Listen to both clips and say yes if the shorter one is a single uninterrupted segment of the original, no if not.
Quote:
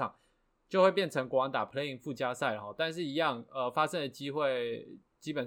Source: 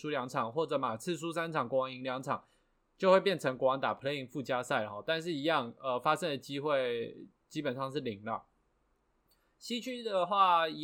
yes